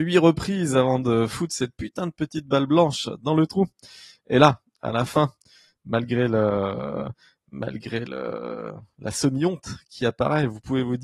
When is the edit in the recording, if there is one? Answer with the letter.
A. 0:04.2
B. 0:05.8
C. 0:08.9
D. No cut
D